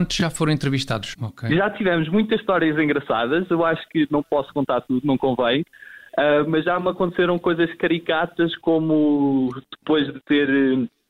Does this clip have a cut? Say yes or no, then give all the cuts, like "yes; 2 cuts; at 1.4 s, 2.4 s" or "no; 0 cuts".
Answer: yes; 1 cut; at 1.1 s